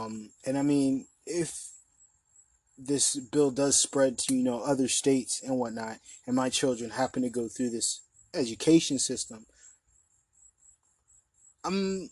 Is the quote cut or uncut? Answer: uncut